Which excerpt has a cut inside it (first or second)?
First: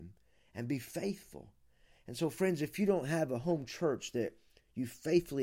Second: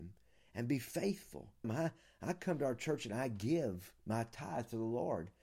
second